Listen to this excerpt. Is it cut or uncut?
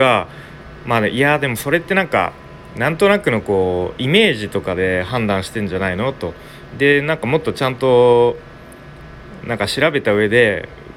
cut